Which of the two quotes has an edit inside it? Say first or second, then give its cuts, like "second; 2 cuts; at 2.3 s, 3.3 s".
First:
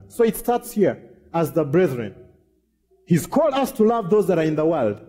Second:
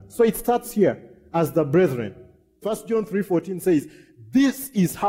second; 1 cut; at 2.6 s